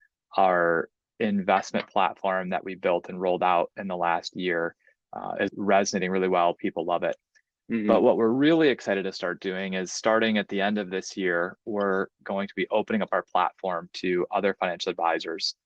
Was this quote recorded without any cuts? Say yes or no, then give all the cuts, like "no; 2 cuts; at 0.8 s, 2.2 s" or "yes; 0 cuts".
no; 1 cut; at 5.5 s